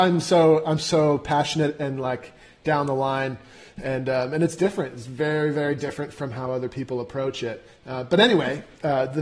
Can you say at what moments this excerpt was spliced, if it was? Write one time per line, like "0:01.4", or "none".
none